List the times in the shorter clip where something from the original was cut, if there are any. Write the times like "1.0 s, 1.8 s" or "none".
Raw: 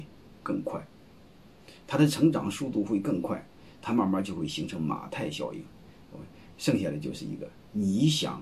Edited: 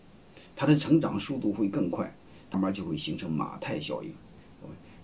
2.5 s